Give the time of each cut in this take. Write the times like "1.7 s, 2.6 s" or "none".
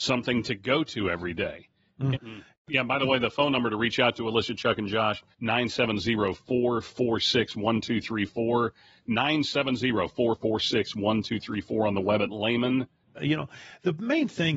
2.1 s, 5.3 s, 13.1 s